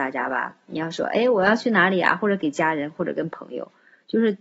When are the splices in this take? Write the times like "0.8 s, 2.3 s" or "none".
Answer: none